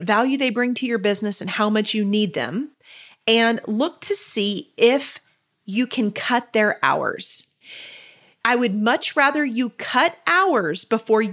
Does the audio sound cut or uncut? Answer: cut